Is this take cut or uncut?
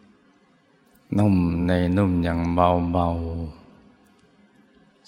uncut